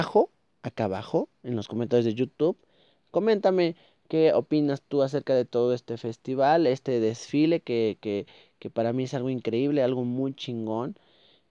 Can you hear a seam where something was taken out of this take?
no; 0 cuts

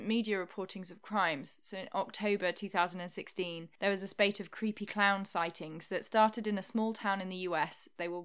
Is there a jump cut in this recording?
no; 0 cuts

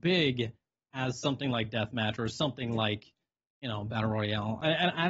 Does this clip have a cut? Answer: no; 0 cuts

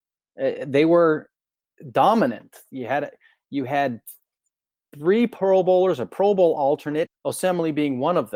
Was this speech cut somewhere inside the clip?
yes; 1 cut; at 7.1 s

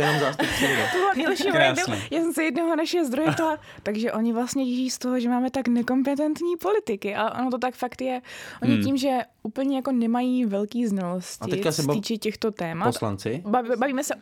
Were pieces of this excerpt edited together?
yes; 1 cut; at 1.1 s

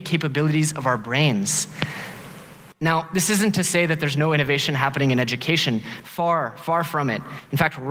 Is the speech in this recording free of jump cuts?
no; 1 cut; at 2.7 s

